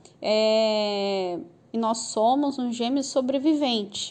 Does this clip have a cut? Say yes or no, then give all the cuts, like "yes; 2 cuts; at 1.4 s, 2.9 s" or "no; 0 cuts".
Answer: yes; 1 cut; at 1.7 s